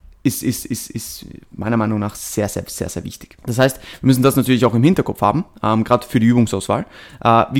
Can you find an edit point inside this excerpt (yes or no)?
yes